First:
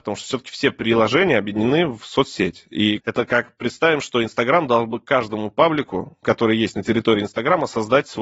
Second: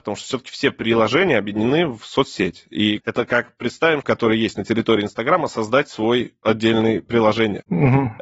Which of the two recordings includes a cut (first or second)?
second